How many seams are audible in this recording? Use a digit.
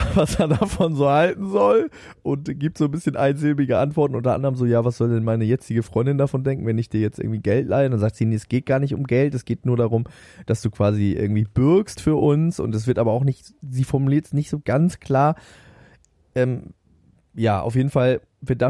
0